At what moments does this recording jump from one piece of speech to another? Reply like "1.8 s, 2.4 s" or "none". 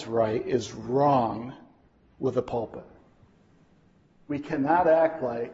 none